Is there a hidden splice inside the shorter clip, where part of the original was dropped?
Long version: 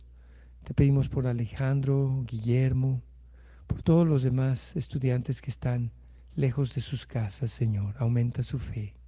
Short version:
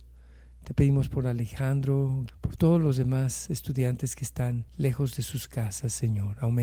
yes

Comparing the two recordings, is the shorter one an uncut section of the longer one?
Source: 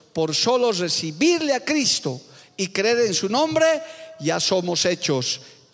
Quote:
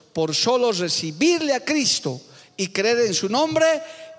yes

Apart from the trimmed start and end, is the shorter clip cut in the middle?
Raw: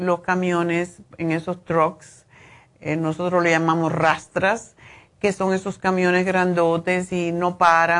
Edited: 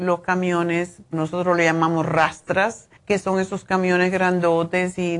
yes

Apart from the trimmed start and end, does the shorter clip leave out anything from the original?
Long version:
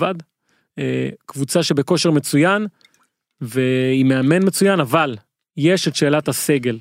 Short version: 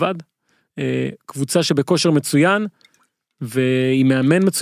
no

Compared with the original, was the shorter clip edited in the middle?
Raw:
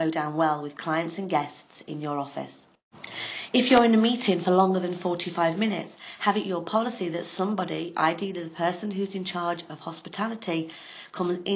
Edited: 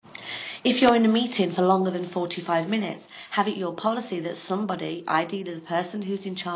no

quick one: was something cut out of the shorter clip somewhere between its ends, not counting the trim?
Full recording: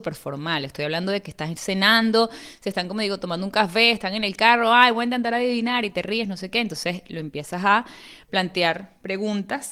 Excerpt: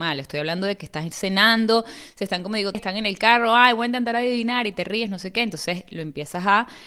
yes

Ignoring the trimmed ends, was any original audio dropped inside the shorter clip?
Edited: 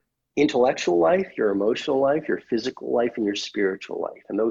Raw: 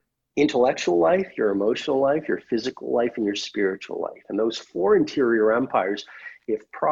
no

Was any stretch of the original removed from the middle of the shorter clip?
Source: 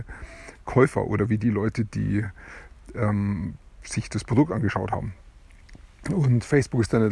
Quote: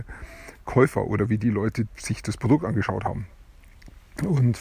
yes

